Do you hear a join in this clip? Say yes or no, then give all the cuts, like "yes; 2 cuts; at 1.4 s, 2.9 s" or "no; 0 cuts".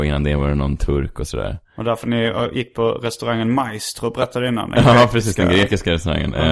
no; 0 cuts